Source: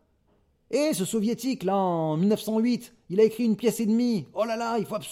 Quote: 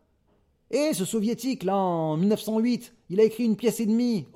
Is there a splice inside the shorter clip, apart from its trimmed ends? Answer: no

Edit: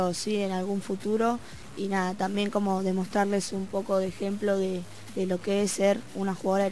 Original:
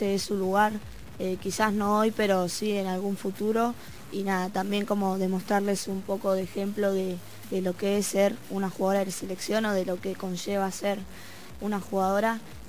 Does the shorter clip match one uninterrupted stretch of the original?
yes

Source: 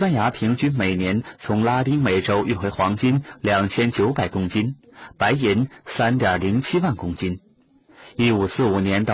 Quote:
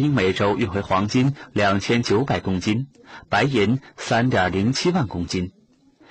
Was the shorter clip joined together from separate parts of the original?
no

